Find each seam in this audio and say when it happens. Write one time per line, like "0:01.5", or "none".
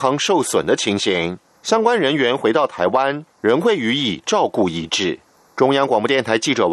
none